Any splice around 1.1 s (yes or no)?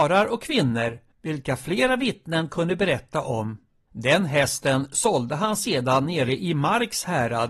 yes